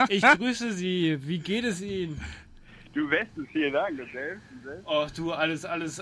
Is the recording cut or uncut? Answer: uncut